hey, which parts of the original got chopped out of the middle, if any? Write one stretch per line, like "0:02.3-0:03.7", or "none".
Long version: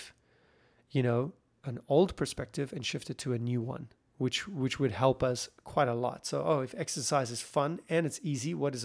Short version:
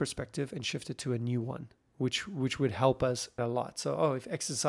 0:05.6-0:05.9